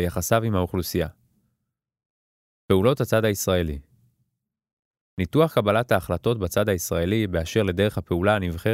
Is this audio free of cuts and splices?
yes; 0 cuts

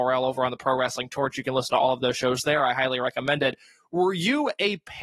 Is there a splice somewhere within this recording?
no; 0 cuts

